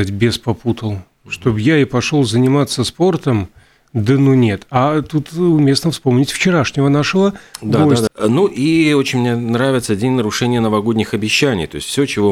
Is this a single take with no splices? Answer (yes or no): no